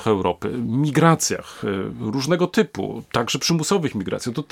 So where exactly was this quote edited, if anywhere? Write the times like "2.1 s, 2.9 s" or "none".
none